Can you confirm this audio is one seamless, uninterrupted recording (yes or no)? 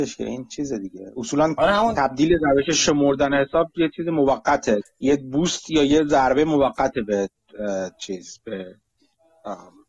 no